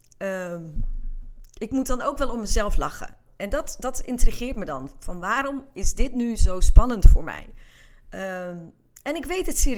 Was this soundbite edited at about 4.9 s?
no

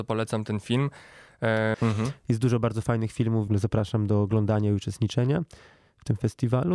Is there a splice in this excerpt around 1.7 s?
yes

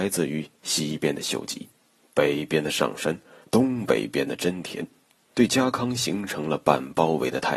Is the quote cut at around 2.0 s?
yes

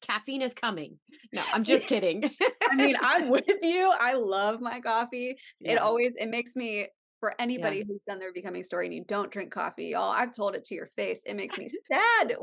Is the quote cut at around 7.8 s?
no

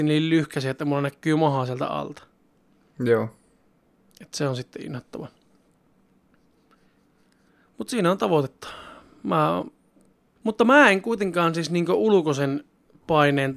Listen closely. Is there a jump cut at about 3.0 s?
no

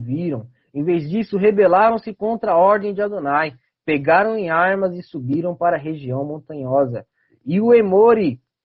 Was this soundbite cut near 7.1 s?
no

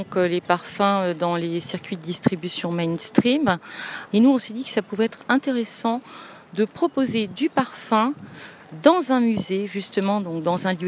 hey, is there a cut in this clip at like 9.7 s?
no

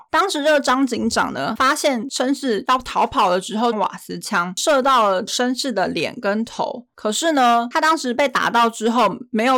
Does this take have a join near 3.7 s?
yes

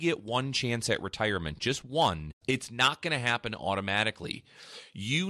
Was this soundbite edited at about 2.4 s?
yes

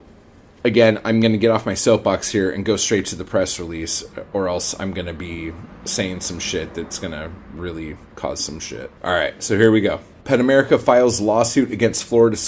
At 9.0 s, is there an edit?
yes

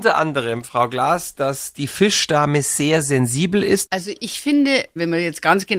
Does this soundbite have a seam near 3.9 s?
yes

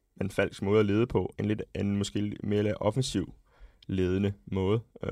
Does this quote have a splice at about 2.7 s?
no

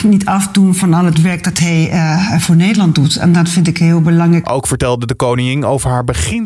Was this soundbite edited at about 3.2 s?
no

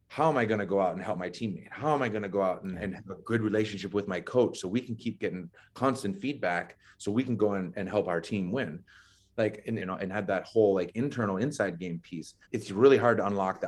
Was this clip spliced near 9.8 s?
yes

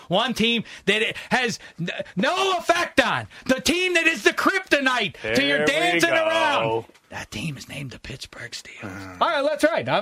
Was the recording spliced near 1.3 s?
yes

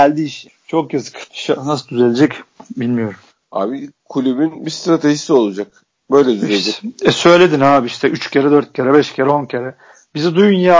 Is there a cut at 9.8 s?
no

